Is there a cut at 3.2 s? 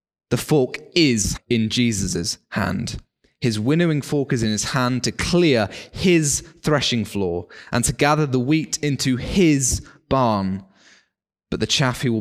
no; 1 cut; at 1.4 s

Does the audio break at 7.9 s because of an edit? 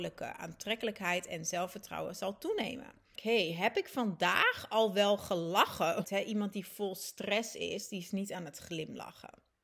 no; 2 cuts; at 3.2 s, 6.0 s

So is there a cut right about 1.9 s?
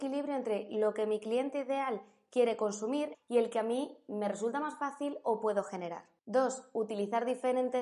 no; 2 cuts; at 3.1 s, 6.2 s

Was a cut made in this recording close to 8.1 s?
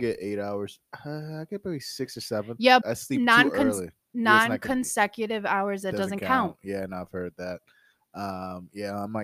no; 1 cut; at 2.8 s

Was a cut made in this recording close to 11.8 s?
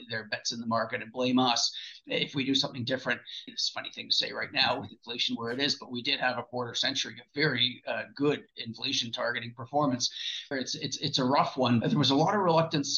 yes; 3 cuts; at 3.5 s, 10.5 s, 11.8 s

